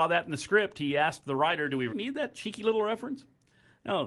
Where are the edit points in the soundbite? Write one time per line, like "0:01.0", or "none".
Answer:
0:01.9